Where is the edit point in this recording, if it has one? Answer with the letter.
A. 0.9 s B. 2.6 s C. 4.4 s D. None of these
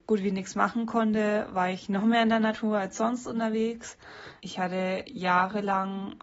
C